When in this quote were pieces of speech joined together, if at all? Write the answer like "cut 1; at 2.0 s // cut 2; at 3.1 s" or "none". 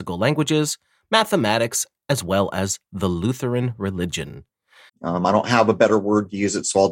cut 1; at 4.9 s